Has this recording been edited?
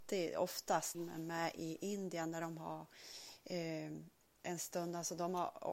yes; 1 cut; at 0.9 s

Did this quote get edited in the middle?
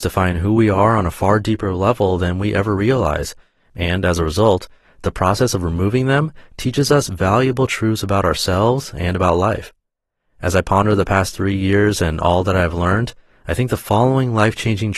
no; 0 cuts

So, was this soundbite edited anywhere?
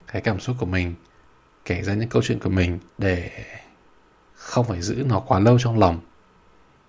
yes; 1 cut; at 2.9 s

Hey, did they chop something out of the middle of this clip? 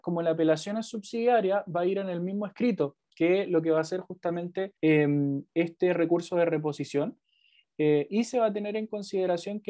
yes; 1 cut; at 4.8 s

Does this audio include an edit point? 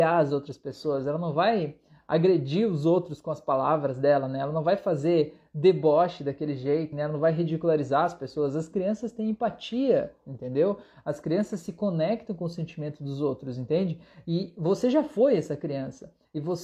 yes; 1 cut; at 6.9 s

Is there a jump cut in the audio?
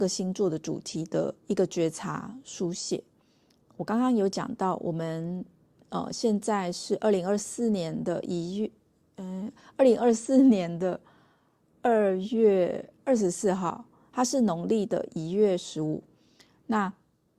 yes; 1 cut; at 1.4 s

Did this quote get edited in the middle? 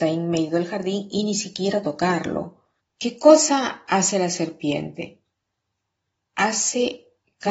yes; 1 cut; at 2.8 s

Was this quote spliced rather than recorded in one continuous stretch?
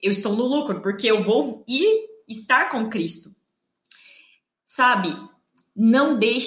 no; 0 cuts

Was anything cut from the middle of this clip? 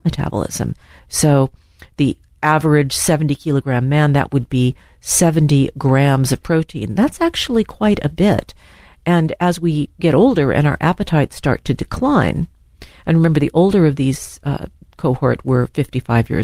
yes; 1 cut; at 1.0 s

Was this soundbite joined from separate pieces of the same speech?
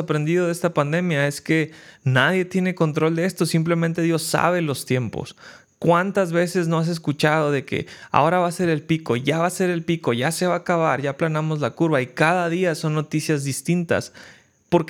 no; 0 cuts

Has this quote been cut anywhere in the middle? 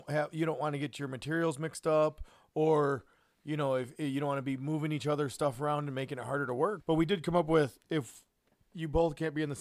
yes; 1 cut; at 6.8 s

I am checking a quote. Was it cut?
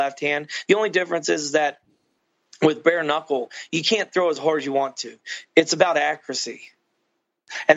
no; 0 cuts

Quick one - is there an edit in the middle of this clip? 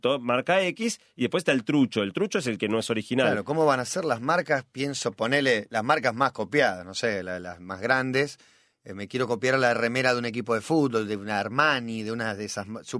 no; 0 cuts

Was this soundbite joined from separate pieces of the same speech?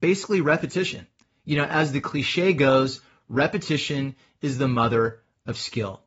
no; 0 cuts

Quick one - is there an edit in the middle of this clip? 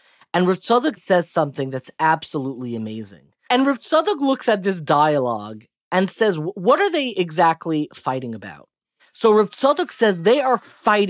yes; 3 cuts; at 1.0 s, 3.5 s, 9.0 s

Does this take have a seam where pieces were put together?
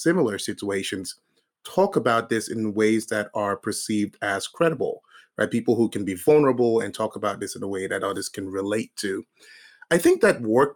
no; 0 cuts

